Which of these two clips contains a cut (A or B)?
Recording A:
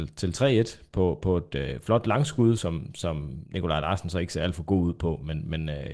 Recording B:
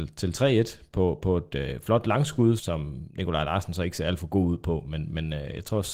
B